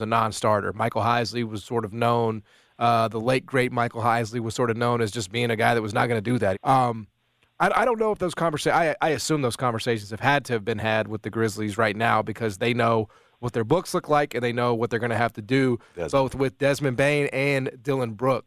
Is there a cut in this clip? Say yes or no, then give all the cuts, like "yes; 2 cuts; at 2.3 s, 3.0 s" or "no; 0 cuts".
yes; 1 cut; at 6.5 s